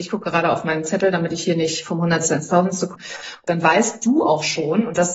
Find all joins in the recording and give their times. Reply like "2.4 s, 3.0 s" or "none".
2.9 s